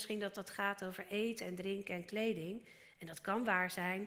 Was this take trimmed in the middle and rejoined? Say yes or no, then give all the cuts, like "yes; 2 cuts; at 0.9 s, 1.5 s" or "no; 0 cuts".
no; 0 cuts